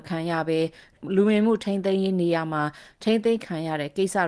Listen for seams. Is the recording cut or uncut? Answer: uncut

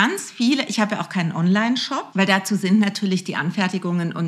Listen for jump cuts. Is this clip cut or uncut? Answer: cut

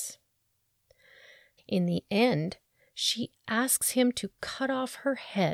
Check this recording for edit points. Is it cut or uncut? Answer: cut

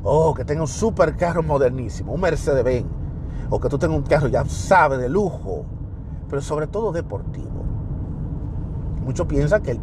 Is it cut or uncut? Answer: uncut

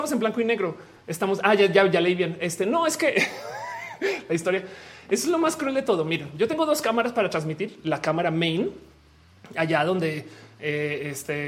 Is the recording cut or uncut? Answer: uncut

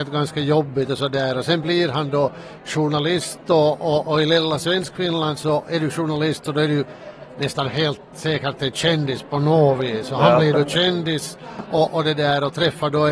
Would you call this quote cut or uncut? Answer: uncut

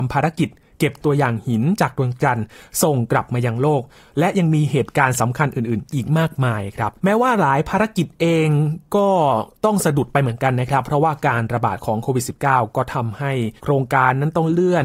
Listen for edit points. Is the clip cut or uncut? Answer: cut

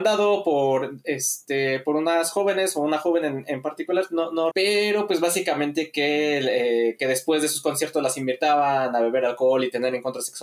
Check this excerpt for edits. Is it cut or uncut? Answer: cut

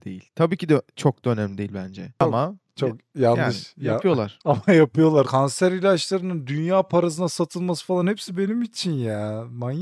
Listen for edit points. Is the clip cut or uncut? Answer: cut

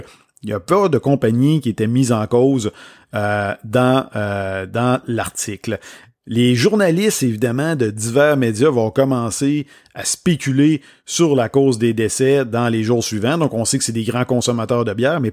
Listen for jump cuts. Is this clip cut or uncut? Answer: uncut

